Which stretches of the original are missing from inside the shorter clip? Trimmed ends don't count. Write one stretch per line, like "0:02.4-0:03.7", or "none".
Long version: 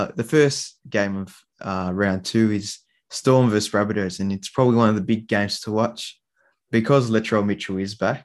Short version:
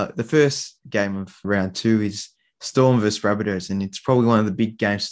0:01.4-0:01.9